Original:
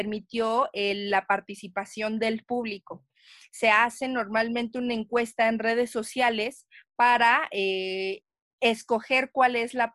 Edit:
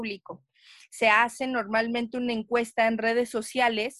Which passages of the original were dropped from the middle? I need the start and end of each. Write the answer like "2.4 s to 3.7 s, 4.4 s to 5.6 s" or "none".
none